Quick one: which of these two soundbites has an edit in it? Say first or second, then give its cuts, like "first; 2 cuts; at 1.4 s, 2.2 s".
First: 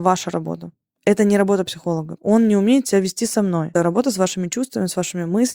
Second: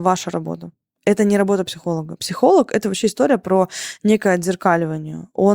first; 2 cuts; at 2.2 s, 3.7 s